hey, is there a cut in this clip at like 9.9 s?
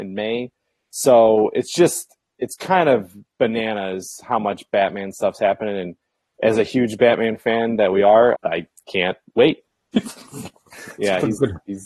yes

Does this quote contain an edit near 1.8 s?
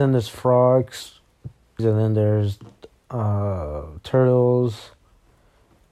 yes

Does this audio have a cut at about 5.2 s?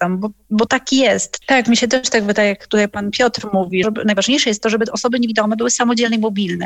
no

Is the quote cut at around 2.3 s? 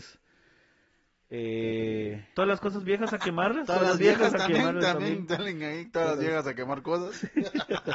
yes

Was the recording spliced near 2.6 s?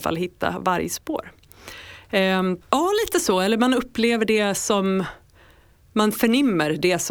yes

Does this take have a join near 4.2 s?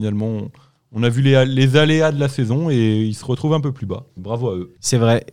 yes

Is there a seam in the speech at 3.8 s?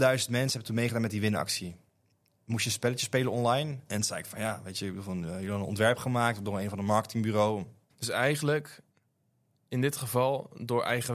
yes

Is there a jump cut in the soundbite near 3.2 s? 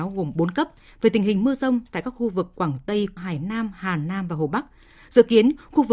yes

